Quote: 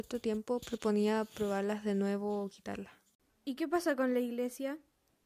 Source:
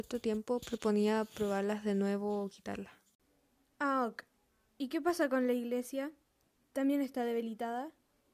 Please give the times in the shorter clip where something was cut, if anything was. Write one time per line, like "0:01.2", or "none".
0:03.3

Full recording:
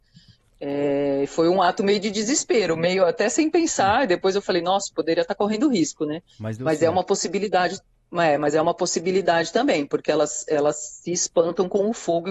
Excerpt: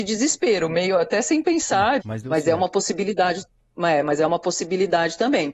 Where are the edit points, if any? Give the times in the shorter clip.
0:02.0

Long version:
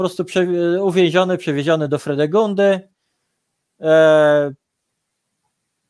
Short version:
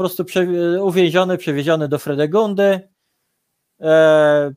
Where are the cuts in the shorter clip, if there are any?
none

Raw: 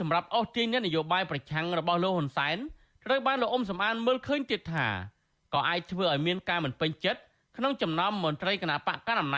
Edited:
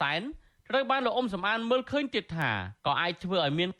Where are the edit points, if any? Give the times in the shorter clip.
0:02.8

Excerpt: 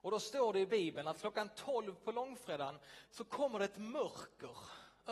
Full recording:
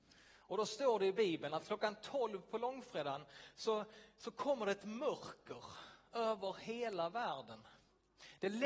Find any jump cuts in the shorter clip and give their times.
0:03.1

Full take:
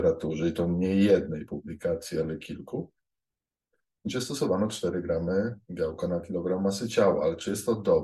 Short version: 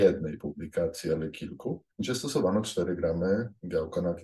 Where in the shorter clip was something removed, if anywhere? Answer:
0:01.9

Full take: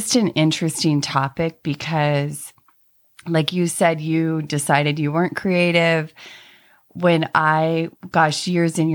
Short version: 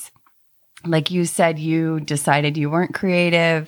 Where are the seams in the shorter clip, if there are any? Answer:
none

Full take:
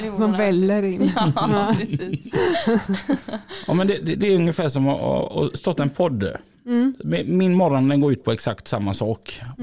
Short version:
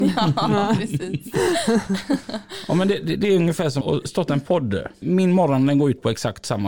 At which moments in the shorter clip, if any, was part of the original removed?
0:03.8
0:05.0

